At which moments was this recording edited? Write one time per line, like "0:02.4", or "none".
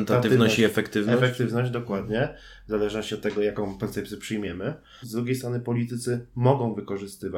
0:05.0

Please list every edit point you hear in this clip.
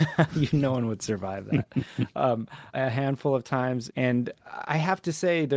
0:02.7
0:03.9

